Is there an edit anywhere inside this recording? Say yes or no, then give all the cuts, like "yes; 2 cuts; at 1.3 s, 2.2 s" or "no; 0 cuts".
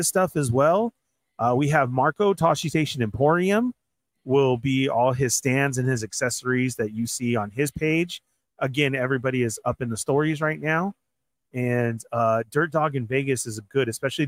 no; 0 cuts